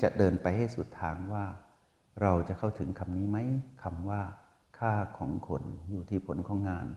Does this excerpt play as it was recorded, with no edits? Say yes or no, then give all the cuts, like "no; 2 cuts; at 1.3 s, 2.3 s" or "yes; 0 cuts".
yes; 0 cuts